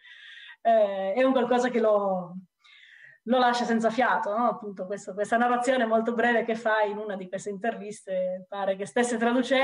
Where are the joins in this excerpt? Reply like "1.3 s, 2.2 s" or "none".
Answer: none